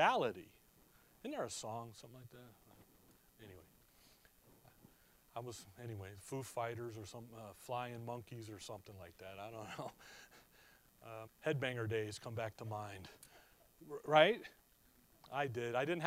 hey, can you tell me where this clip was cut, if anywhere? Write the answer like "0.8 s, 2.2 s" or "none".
11.3 s